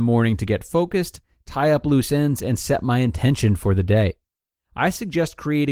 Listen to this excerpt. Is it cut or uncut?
uncut